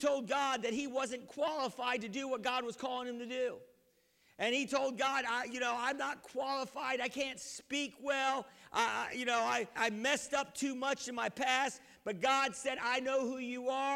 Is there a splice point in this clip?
yes; 1 cut; at 9.8 s

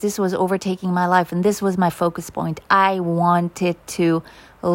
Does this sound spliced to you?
no; 0 cuts

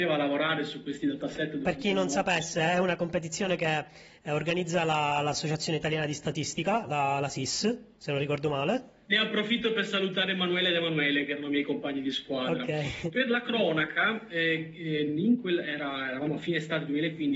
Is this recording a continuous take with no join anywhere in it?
no; 1 cut; at 9.1 s

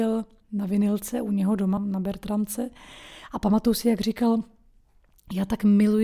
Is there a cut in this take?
yes; 1 cut; at 1.8 s

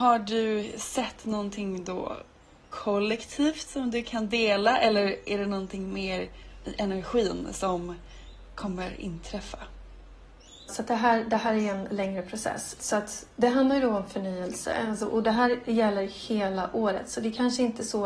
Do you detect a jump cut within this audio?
yes; 2 cuts; at 10.7 s, 12.8 s

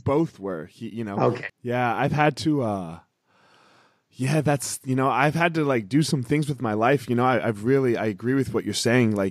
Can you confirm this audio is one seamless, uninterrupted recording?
no; 1 cut; at 1.5 s

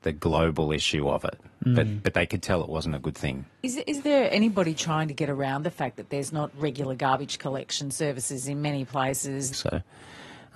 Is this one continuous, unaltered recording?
no; 1 cut; at 9.5 s

